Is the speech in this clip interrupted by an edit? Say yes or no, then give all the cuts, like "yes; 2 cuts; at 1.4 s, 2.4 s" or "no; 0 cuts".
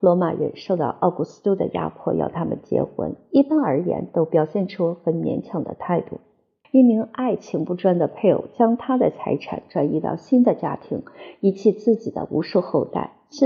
yes; 1 cut; at 6.6 s